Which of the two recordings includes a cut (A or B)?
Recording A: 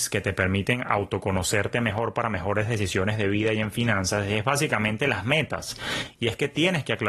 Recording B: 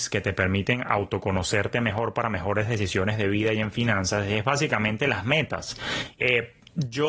B